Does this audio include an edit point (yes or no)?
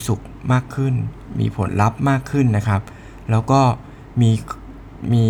no